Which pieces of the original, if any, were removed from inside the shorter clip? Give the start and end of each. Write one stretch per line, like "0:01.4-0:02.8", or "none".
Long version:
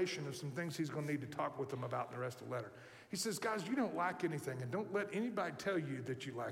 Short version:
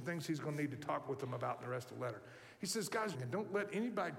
0:03.6-0:04.5